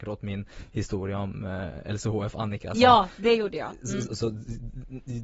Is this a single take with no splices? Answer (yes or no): no